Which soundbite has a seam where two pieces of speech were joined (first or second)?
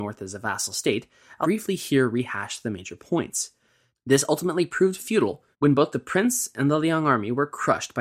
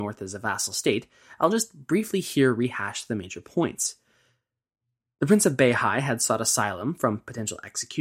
first